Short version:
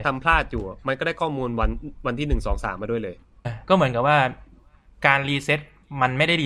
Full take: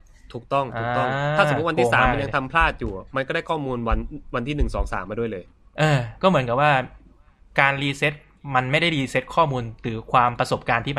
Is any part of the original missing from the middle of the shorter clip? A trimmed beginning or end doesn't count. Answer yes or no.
yes